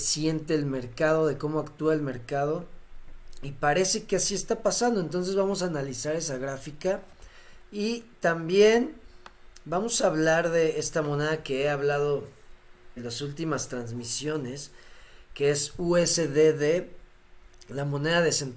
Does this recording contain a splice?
yes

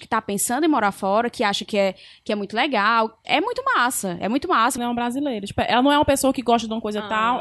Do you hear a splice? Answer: yes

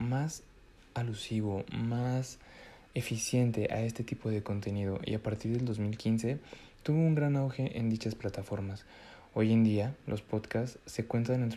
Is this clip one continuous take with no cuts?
yes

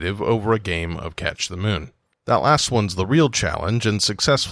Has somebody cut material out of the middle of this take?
yes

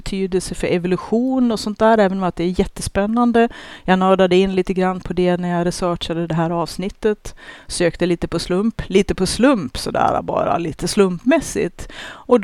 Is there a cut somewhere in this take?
no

